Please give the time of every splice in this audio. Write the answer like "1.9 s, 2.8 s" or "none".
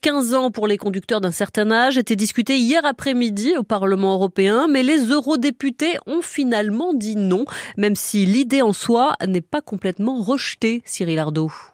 none